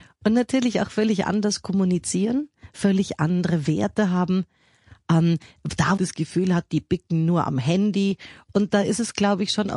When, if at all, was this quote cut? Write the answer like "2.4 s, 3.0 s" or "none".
6.0 s